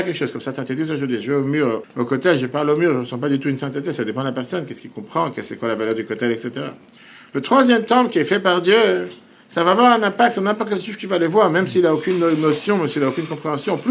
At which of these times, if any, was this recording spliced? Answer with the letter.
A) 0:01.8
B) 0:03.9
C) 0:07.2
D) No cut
A